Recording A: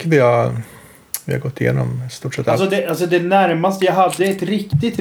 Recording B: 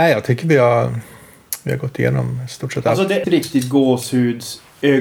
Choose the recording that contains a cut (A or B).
B